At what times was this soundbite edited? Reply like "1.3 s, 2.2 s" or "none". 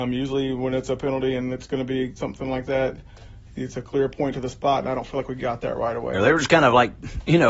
6.1 s

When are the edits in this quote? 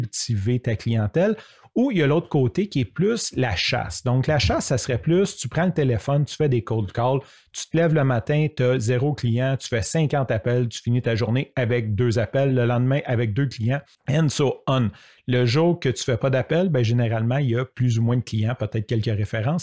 13.9 s

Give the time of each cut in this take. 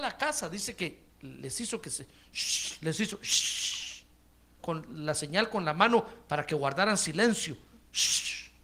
4.6 s

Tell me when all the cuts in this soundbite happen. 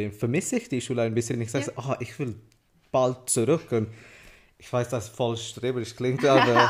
none

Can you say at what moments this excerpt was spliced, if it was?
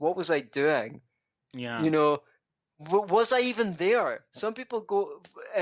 none

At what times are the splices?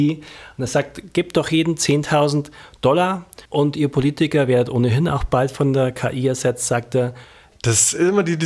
3.5 s, 7.5 s

